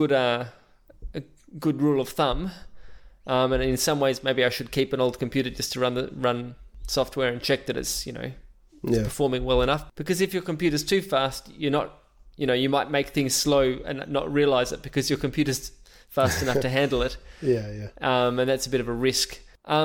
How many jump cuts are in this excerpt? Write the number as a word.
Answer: zero